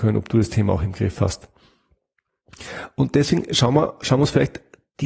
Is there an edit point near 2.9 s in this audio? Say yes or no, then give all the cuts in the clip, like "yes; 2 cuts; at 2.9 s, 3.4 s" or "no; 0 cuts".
no; 0 cuts